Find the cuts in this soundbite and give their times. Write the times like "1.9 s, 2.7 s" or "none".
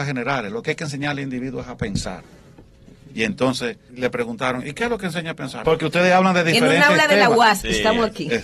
3.9 s, 5.6 s